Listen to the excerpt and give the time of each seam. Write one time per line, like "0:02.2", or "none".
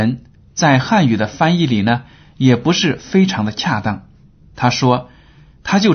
0:04.4